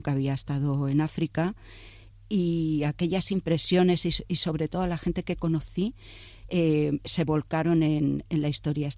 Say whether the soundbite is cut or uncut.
uncut